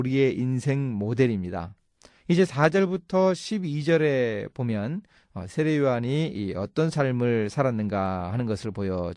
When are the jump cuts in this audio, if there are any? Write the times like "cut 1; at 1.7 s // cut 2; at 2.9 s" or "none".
cut 1; at 2.2 s